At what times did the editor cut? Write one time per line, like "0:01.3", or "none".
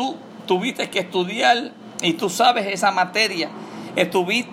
none